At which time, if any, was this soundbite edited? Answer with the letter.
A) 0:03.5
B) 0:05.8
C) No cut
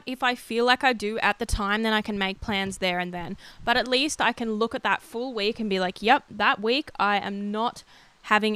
C